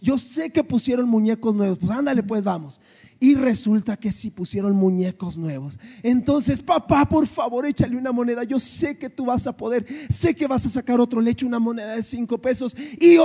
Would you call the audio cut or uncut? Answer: uncut